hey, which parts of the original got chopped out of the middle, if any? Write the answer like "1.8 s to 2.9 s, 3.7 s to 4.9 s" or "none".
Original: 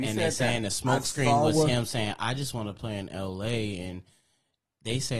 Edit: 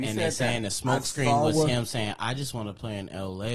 none